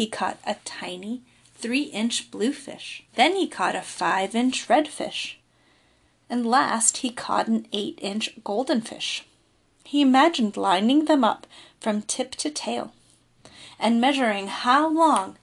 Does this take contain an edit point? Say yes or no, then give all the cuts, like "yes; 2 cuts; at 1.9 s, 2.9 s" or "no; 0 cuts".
yes; 1 cut; at 3.1 s